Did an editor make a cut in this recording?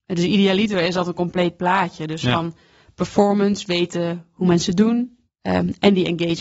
yes; 1 cut; at 5.3 s

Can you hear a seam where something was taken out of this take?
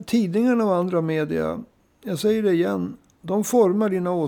no; 0 cuts

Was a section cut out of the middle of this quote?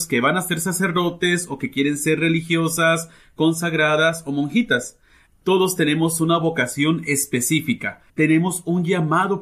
yes; 2 cuts; at 5.3 s, 8.1 s

